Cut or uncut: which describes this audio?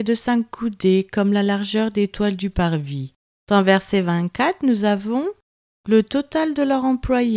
cut